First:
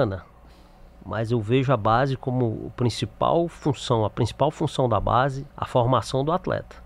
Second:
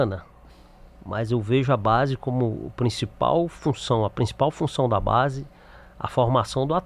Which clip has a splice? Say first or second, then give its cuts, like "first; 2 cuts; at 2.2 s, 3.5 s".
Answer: first; 1 cut; at 5.5 s